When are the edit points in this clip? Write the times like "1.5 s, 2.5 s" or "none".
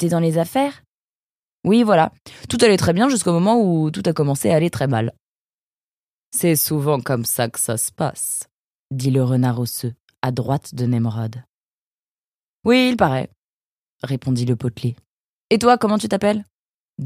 none